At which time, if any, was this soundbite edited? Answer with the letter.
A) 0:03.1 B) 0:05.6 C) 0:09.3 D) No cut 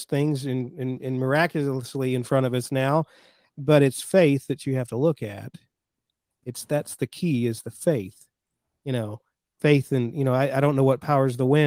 D